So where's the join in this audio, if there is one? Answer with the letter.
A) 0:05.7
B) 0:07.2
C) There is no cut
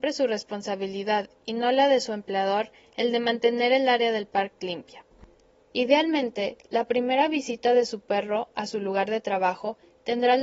A